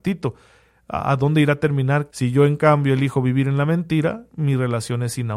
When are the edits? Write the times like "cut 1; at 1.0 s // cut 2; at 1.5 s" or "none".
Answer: cut 1; at 2.1 s